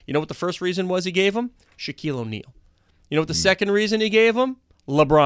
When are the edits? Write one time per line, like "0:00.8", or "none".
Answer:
none